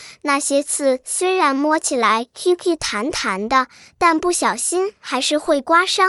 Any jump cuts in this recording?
no; 0 cuts

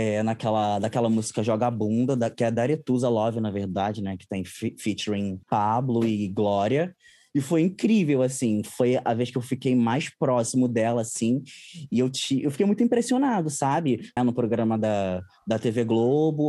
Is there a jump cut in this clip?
yes; 2 cuts; at 5.4 s, 14.2 s

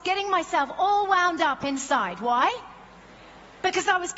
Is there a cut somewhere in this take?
no; 0 cuts

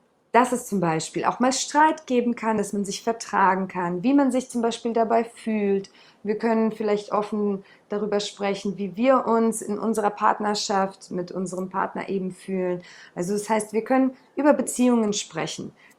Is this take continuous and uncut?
yes; 0 cuts

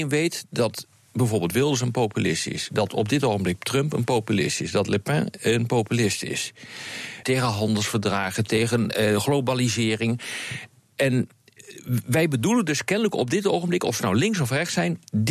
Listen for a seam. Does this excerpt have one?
yes; 1 cut; at 7.2 s

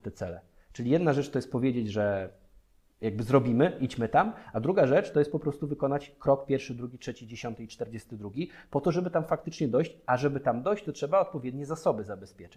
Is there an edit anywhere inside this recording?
no; 0 cuts

